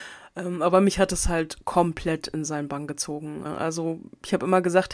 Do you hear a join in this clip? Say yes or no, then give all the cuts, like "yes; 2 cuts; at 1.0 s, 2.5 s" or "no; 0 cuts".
yes; 1 cut; at 3.5 s